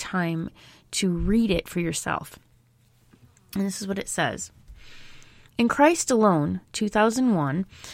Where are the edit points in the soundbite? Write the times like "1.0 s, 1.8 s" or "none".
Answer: none